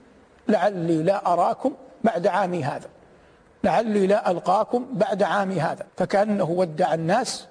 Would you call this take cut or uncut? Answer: cut